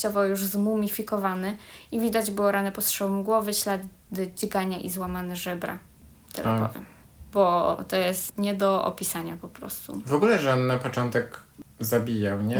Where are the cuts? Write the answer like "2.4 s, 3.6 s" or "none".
6.1 s, 8.3 s